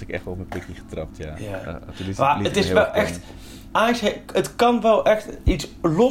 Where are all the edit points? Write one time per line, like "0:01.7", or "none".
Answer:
none

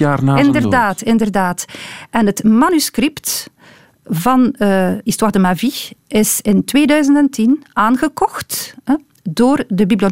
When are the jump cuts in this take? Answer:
none

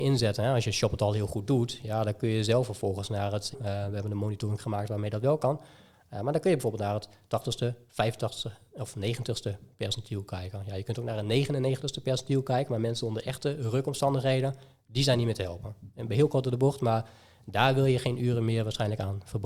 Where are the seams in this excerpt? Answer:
0:03.5

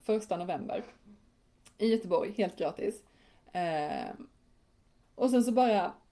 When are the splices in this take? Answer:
0:05.0

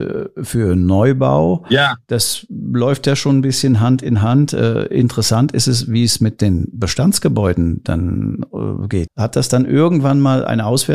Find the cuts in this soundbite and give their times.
0:09.1

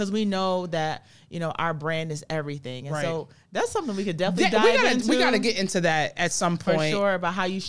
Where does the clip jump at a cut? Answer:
none

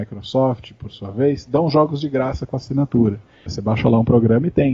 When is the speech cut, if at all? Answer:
0:03.5

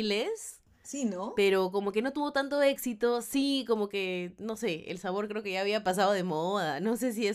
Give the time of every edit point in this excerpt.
none

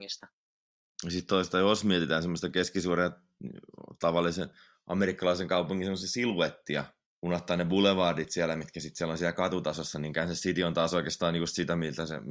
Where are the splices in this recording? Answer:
none

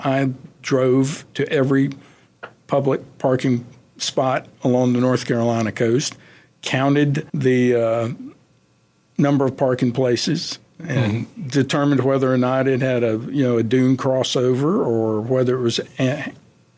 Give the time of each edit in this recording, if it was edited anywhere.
0:07.3

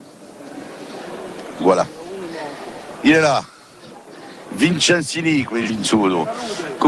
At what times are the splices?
0:05.7

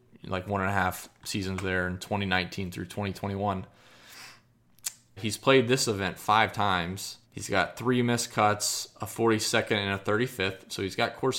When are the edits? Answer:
0:05.2
0:07.2

